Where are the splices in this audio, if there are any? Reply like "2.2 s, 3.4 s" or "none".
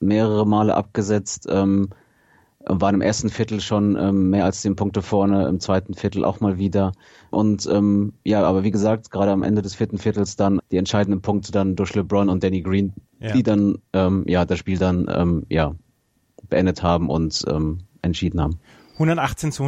7.3 s, 10.6 s, 13.1 s